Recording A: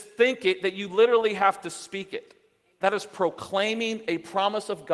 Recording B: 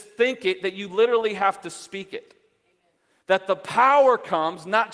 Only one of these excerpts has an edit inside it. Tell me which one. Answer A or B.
A